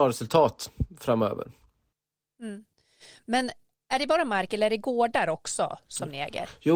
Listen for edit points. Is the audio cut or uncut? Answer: uncut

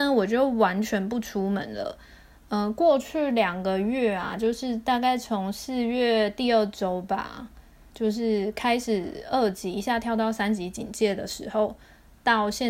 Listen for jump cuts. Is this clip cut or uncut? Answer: uncut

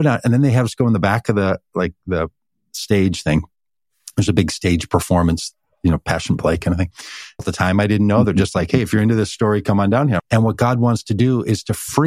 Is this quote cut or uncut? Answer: cut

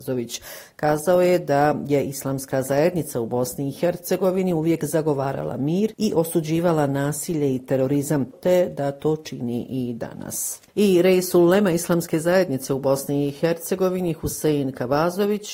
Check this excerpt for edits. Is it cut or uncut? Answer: cut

